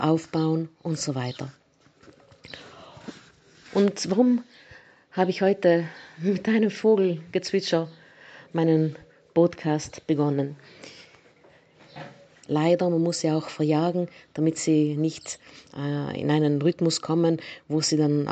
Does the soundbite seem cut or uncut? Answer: cut